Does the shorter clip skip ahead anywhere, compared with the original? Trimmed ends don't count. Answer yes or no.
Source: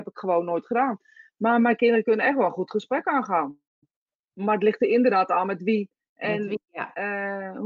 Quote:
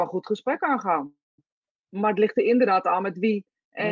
no